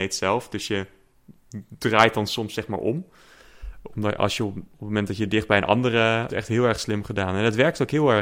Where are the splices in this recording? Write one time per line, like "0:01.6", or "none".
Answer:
0:06.3